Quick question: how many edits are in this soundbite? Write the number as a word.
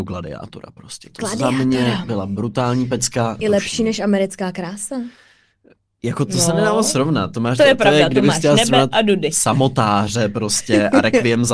one